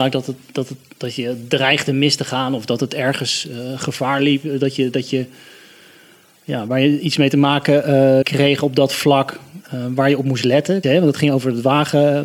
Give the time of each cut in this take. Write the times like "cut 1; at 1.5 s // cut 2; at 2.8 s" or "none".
cut 1; at 8.2 s // cut 2; at 10.8 s

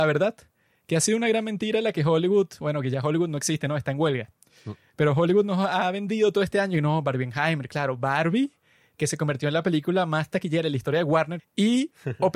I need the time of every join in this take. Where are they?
cut 1; at 11.4 s

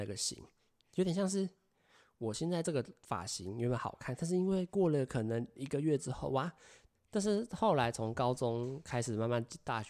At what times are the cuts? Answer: cut 1; at 6.9 s

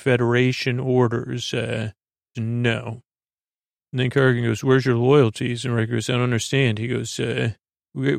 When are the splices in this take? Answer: cut 1; at 2.3 s

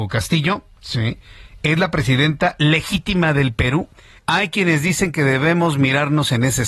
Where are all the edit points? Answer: cut 1; at 4.2 s

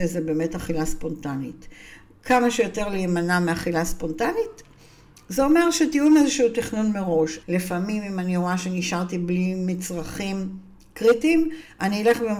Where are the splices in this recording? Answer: cut 1; at 7.4 s

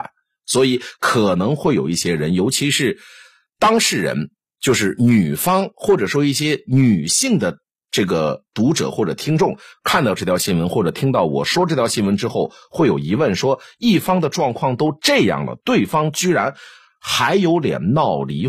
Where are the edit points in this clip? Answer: none

